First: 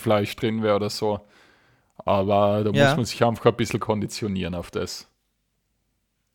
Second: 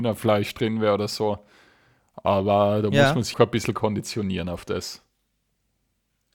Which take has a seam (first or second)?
second